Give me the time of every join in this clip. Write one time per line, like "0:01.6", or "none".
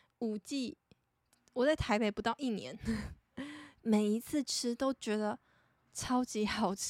0:01.3
0:03.8